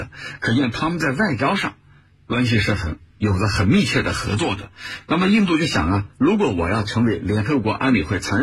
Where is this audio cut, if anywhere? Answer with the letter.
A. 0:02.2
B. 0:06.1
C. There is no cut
C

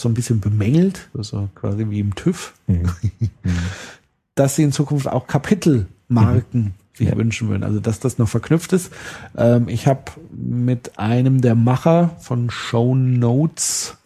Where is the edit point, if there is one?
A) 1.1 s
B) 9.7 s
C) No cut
A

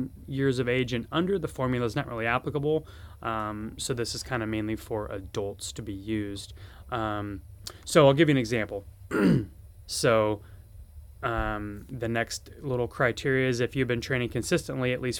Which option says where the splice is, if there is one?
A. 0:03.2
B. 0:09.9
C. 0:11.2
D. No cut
B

